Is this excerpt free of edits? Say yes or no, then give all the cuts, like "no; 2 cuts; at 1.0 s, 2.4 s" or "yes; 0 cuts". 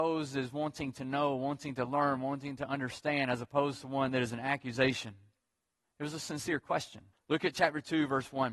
no; 2 cuts; at 5.8 s, 7.1 s